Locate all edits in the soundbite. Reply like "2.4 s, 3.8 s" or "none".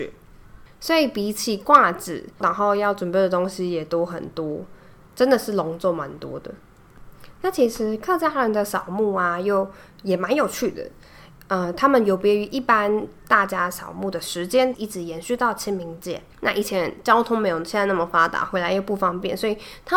2.4 s, 14.7 s, 16.3 s

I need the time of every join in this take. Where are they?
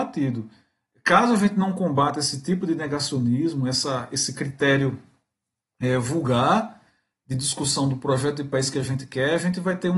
none

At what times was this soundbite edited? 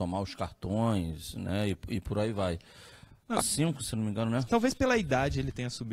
3.4 s, 4.5 s

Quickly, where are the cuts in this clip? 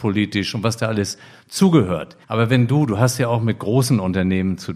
2.2 s

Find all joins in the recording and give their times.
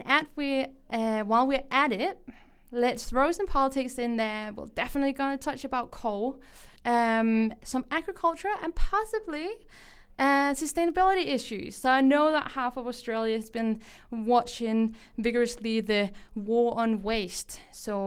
6.8 s

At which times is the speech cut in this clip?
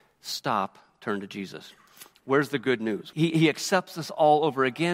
3.1 s

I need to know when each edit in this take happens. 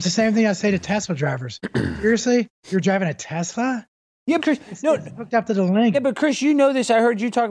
4.4 s, 5.9 s

